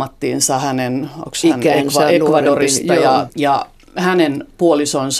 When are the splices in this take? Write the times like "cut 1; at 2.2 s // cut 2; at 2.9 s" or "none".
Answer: cut 1; at 3.3 s